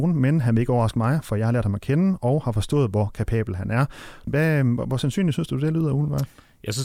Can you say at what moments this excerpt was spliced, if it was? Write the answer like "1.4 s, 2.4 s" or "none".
4.3 s